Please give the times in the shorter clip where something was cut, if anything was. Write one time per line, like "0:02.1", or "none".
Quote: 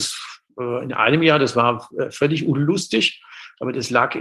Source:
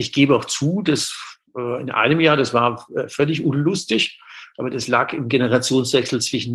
none